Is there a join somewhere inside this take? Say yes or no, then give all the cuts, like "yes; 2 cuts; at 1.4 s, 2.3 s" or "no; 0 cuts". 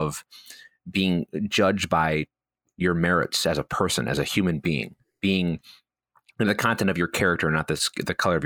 no; 0 cuts